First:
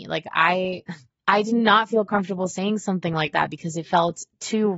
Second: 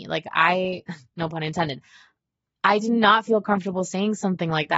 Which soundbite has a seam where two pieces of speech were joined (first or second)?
first